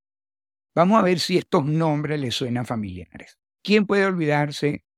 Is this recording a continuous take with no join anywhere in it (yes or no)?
no